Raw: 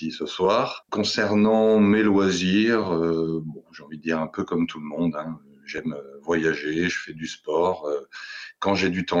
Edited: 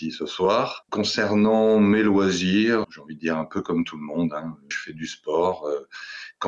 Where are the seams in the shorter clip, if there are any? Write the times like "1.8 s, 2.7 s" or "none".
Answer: 2.8 s, 4.7 s